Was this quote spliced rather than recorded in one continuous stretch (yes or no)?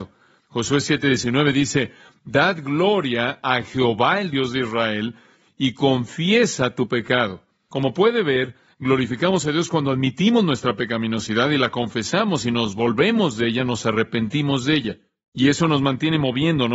no